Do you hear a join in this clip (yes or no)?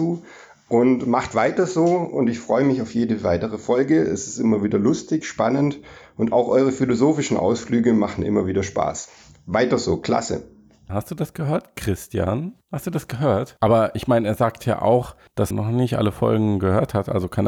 yes